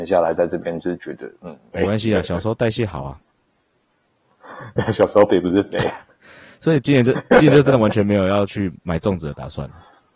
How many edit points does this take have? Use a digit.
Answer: 2